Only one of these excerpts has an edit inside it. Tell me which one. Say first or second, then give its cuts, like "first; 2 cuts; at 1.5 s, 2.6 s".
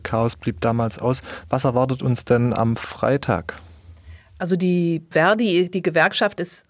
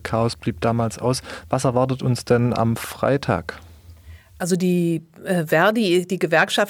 first; 1 cut; at 5.1 s